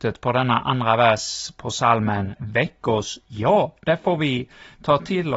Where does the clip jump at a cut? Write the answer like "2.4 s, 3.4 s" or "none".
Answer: 2.4 s